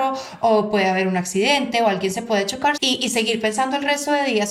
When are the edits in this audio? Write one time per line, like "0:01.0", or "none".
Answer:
0:02.8